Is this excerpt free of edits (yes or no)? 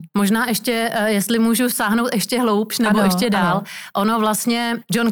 yes